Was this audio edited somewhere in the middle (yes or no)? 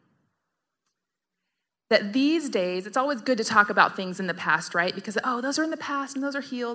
no